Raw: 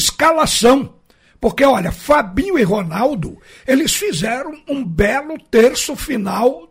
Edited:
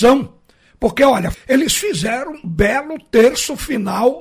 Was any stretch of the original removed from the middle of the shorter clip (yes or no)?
yes